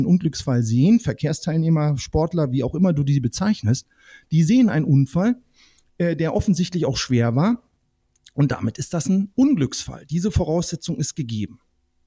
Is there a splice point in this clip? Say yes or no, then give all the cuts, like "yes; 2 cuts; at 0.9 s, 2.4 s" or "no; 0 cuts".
no; 0 cuts